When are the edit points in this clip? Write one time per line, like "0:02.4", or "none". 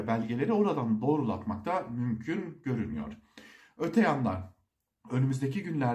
none